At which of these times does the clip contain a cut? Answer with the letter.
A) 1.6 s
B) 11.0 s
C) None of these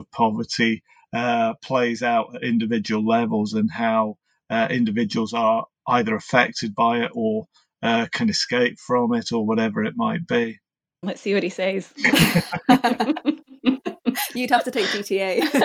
B